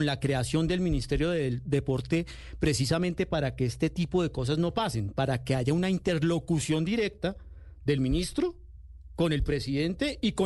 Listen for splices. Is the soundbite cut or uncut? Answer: uncut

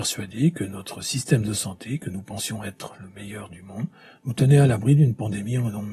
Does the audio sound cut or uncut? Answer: uncut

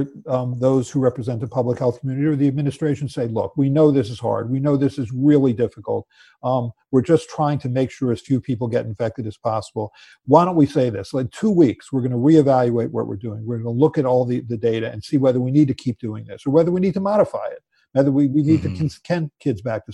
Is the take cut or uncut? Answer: uncut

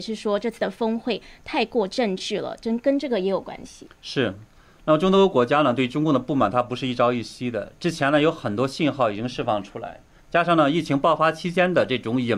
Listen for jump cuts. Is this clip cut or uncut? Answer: cut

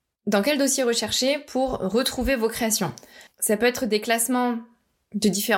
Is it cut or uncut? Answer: uncut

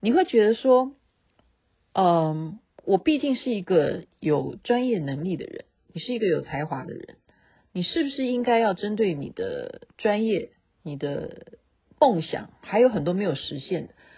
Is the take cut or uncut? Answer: uncut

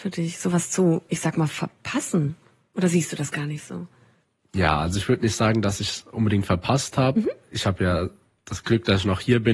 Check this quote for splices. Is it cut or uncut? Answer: uncut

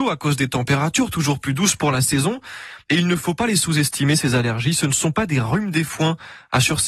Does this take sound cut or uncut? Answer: uncut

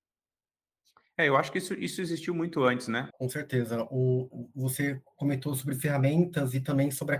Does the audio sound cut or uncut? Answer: cut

